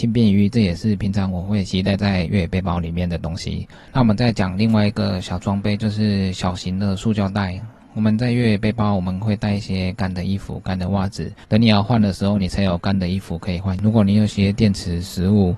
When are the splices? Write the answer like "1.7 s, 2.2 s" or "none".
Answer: 11.4 s